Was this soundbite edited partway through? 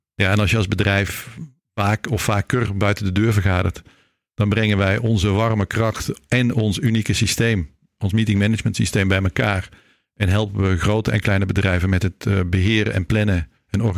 no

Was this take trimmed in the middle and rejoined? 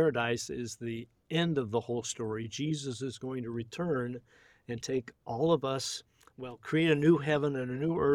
no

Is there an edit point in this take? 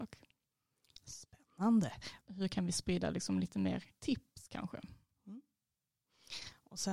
yes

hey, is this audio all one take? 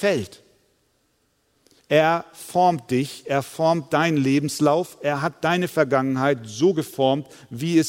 no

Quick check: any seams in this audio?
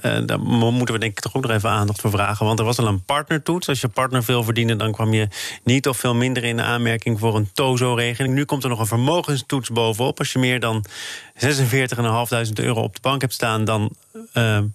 no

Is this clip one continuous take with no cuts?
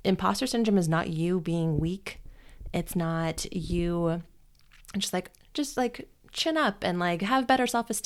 yes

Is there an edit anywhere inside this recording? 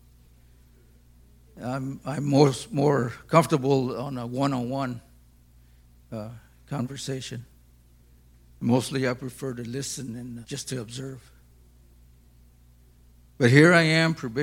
yes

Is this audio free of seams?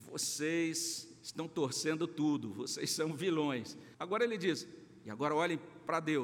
no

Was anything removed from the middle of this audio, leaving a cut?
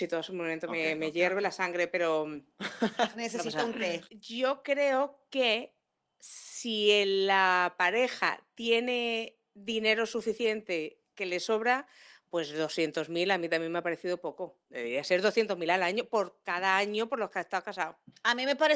yes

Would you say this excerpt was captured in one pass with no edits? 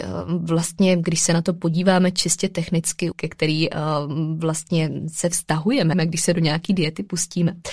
no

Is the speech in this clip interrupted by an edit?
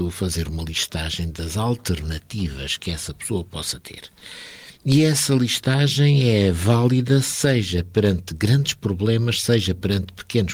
no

